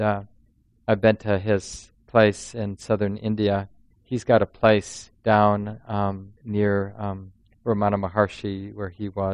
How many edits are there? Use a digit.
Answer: 2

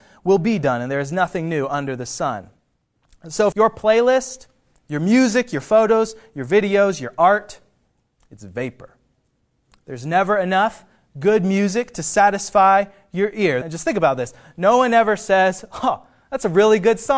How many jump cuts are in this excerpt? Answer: 2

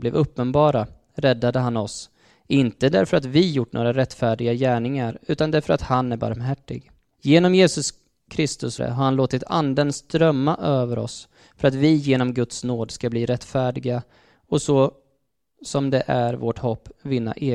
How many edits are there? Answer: 2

